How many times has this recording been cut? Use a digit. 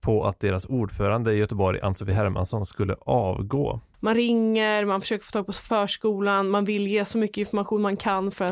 1